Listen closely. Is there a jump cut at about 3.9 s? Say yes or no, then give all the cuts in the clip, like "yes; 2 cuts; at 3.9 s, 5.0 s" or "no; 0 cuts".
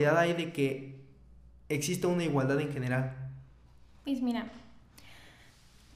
no; 0 cuts